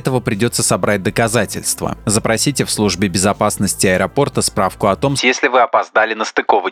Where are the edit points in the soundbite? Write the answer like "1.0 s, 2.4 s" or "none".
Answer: 5.2 s